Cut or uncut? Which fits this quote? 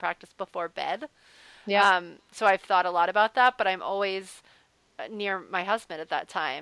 uncut